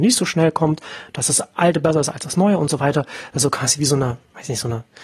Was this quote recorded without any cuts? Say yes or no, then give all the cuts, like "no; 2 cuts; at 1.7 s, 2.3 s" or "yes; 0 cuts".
yes; 0 cuts